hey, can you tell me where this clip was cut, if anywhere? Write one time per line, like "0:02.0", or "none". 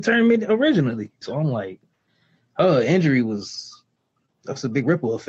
0:01.2